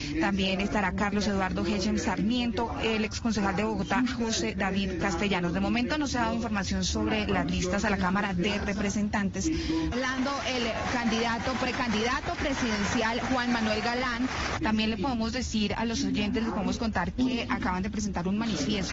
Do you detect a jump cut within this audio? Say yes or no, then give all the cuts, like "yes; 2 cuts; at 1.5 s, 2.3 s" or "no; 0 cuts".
yes; 2 cuts; at 9.9 s, 14.6 s